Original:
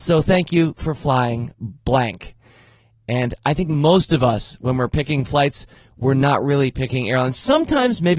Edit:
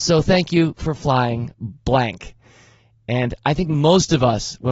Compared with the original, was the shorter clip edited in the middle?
no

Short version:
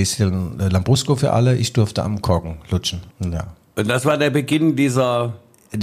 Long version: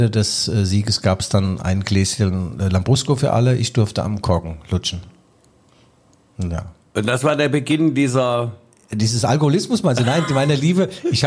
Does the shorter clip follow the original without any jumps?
no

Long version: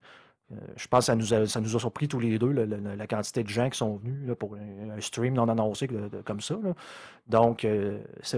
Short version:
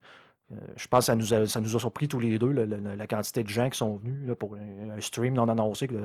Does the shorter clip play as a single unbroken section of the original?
yes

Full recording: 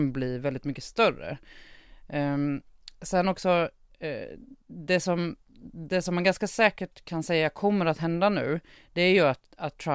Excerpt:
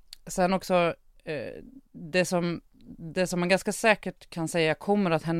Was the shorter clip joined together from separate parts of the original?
no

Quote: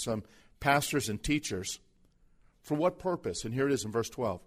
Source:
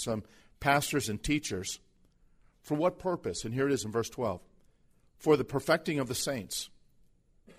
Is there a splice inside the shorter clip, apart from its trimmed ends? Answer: no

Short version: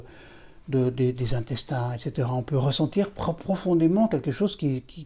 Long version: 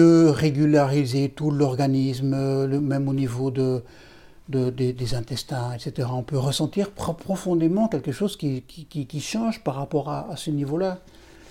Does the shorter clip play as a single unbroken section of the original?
yes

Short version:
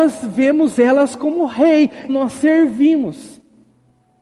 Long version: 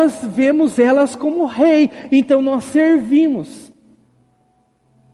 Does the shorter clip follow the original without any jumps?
no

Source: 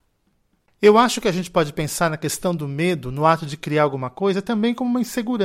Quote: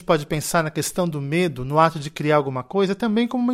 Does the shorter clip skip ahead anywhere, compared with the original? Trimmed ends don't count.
no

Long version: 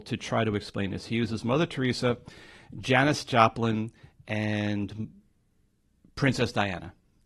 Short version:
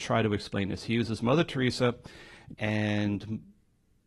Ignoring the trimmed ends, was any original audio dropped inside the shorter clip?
yes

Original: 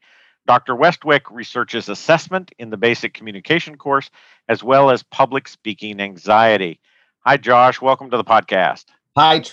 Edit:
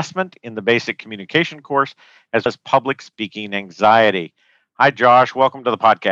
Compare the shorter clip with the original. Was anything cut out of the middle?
yes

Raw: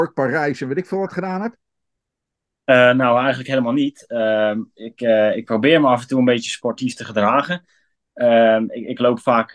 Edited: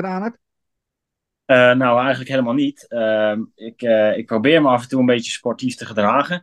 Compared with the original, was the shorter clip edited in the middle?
no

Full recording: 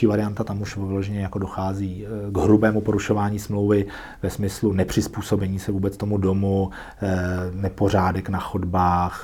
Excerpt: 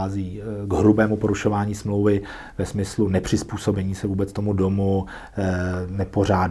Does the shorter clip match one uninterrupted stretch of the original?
yes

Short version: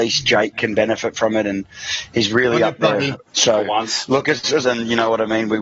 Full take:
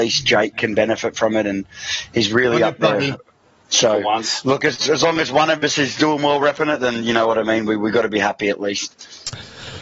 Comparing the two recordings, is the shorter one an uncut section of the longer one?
no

